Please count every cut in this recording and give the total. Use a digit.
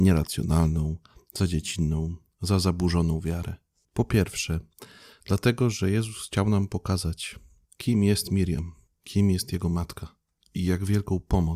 1